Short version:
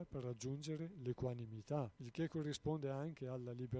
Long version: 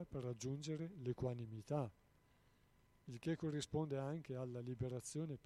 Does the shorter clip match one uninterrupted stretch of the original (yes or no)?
no